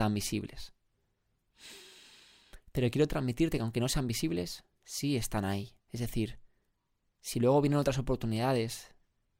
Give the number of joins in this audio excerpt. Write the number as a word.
zero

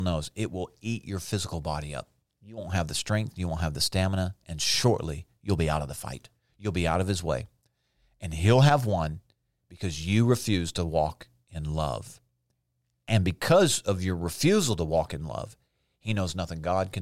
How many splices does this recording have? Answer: zero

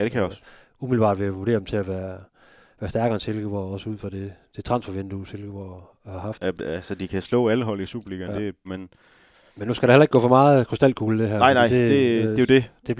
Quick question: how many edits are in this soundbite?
two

